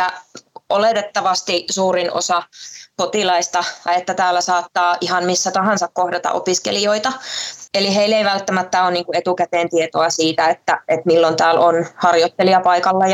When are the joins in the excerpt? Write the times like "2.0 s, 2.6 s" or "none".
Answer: 3.9 s, 7.7 s